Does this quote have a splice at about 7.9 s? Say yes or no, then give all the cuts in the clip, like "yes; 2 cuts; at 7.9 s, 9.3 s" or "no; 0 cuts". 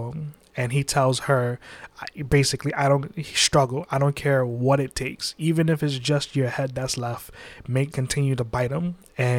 yes; 1 cut; at 7.9 s